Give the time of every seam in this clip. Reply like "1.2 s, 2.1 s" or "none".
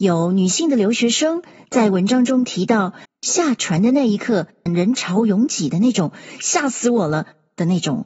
3.1 s, 4.7 s